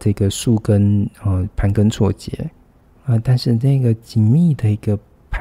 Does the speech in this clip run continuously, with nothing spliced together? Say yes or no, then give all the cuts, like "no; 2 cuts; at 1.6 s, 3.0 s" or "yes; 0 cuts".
yes; 0 cuts